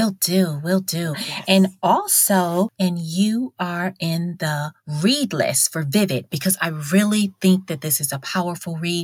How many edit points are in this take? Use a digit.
3